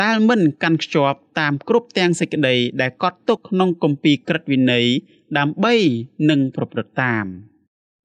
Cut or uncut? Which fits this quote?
cut